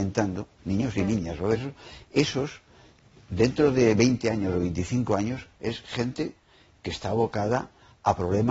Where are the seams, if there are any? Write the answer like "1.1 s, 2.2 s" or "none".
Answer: none